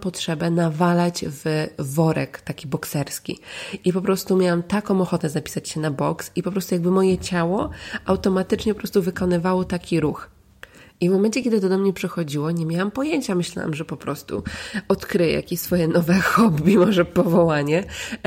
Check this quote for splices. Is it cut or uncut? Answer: uncut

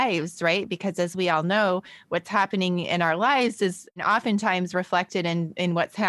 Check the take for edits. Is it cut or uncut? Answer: uncut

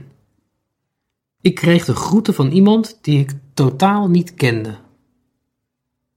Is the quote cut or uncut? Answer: uncut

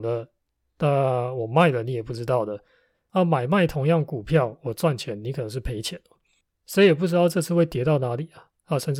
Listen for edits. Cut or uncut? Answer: uncut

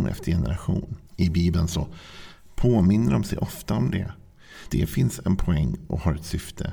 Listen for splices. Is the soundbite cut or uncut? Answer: cut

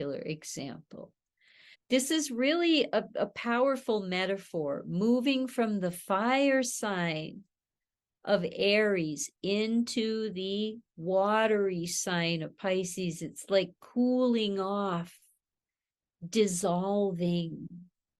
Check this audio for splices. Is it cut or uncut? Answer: cut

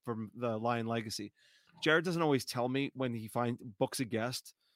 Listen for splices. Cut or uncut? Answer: uncut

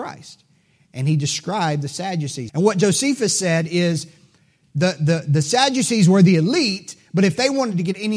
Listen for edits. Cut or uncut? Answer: cut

